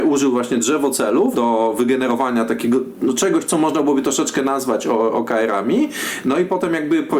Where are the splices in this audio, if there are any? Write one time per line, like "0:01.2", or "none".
0:01.3

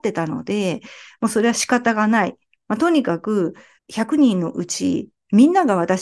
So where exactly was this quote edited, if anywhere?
0:03.8

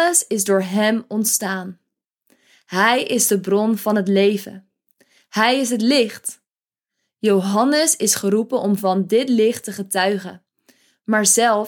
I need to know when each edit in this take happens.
none

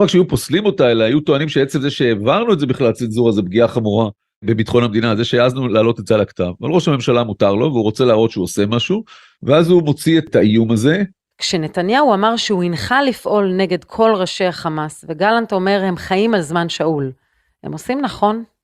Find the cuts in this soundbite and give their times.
0:11.3

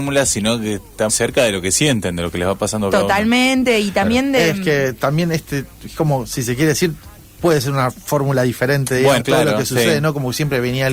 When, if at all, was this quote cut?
0:01.1
0:09.2

